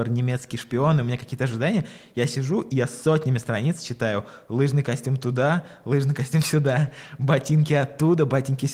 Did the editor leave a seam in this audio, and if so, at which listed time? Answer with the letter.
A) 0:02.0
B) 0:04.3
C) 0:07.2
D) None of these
D